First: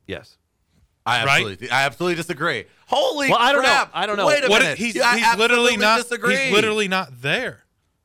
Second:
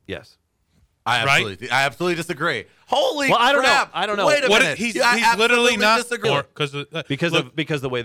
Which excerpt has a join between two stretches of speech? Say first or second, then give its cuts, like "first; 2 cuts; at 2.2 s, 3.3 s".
second; 1 cut; at 6.2 s